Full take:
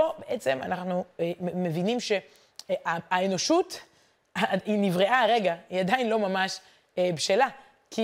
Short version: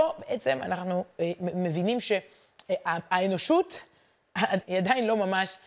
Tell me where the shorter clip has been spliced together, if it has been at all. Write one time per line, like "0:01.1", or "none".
0:04.6